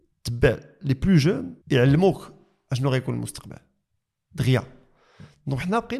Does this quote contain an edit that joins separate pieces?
yes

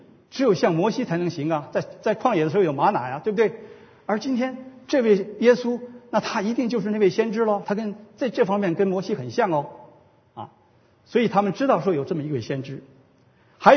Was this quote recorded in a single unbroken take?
no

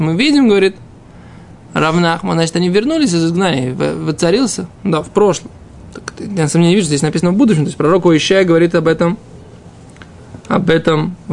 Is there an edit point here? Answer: no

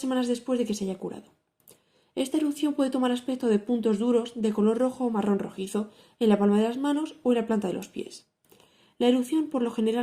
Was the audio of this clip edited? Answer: no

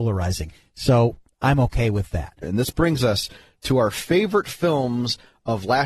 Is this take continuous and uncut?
no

